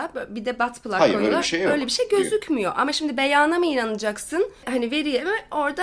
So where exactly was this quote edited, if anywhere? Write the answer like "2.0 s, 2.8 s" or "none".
none